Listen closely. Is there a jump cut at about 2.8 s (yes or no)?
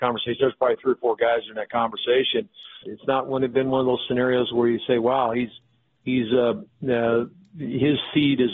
yes